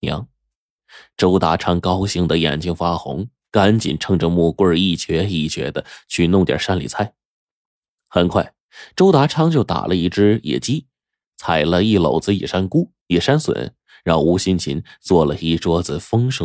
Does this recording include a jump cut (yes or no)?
no